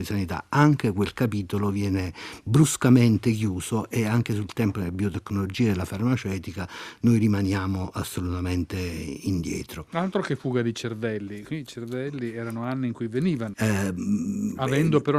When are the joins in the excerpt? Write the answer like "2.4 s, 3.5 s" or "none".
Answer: 13.5 s